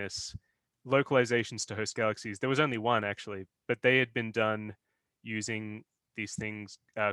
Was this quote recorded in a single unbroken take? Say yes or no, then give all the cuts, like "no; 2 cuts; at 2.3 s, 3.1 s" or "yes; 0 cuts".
yes; 0 cuts